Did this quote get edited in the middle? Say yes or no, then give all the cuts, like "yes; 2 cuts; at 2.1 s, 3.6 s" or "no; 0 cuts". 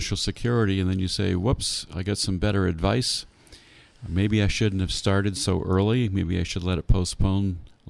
no; 0 cuts